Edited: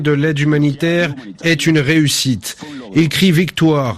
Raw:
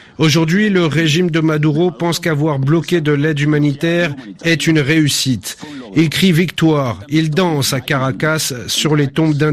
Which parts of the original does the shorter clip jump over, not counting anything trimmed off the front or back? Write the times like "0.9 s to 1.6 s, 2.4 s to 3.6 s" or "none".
none